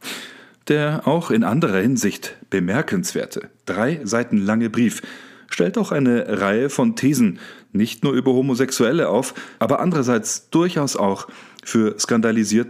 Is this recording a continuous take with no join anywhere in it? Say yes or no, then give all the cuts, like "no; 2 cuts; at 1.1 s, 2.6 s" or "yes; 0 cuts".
no; 1 cut; at 9.6 s